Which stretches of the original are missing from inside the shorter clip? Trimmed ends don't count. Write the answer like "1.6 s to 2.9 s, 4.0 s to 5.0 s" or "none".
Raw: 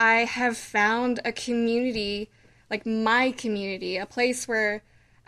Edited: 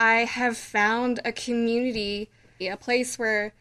2.6 s to 3.9 s